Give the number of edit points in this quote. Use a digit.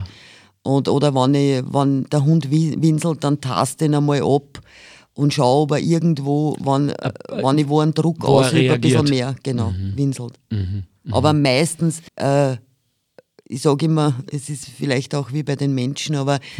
1